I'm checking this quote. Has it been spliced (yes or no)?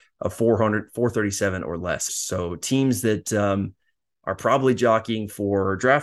yes